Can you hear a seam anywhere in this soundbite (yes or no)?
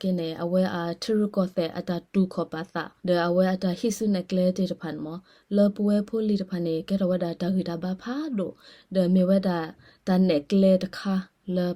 yes